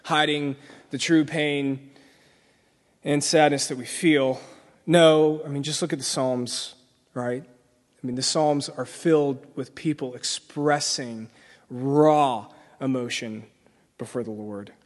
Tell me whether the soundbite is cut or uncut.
uncut